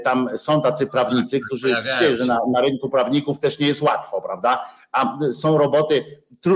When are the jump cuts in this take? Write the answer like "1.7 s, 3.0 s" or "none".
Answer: none